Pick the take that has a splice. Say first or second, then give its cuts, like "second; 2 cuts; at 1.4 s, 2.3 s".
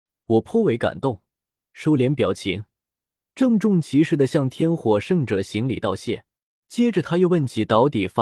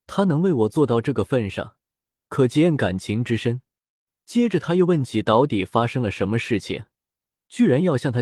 first; 1 cut; at 6.6 s